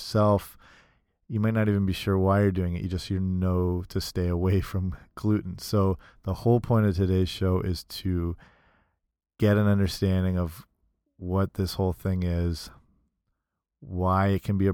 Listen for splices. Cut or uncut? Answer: uncut